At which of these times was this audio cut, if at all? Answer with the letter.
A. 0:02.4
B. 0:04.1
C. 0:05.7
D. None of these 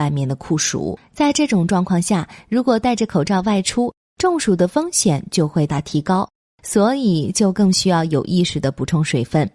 C